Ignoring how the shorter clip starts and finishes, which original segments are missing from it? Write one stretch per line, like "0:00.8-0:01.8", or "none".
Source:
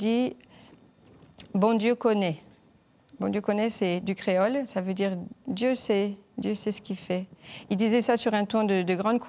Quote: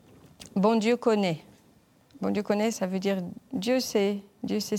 0:03.7-0:04.7